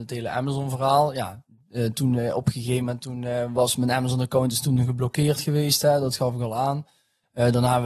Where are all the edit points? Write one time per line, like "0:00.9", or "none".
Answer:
none